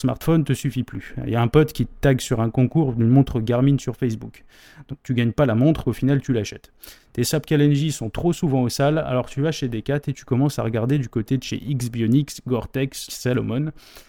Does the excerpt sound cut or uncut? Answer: cut